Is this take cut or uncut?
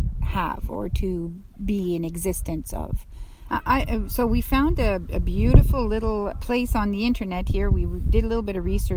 cut